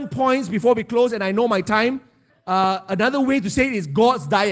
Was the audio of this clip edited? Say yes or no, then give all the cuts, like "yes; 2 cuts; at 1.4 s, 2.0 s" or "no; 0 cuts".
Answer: yes; 1 cut; at 2.3 s